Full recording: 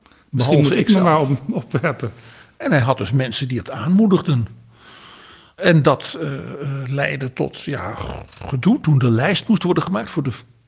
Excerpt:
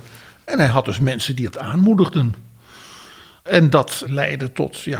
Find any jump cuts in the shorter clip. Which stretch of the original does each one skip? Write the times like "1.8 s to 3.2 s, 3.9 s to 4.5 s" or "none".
6.2 s to 6.9 s